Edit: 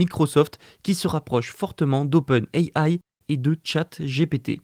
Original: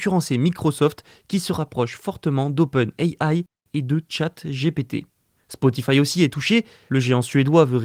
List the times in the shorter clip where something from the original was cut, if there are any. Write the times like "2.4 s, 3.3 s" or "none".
none